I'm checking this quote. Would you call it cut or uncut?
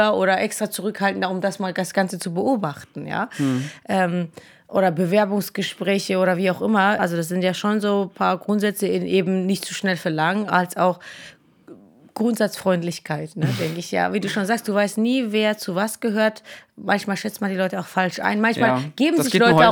cut